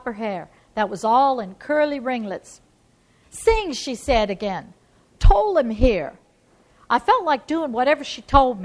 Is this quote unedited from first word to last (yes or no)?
yes